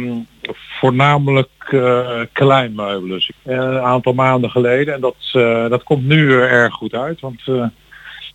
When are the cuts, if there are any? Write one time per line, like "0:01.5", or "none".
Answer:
0:03.3